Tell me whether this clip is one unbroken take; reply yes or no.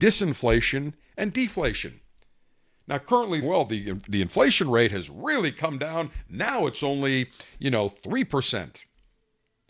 no